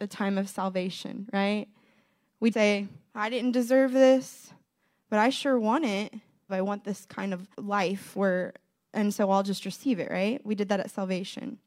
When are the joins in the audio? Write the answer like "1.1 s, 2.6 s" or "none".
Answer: 2.5 s, 6.5 s, 7.5 s